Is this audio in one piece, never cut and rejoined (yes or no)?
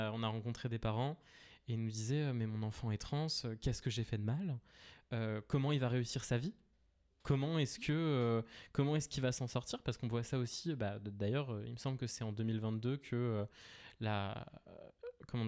yes